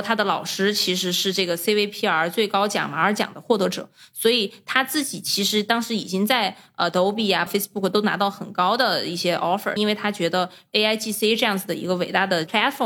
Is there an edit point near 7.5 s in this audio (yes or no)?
yes